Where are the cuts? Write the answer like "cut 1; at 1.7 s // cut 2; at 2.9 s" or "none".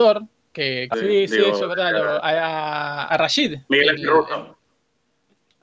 cut 1; at 0.9 s // cut 2; at 3.1 s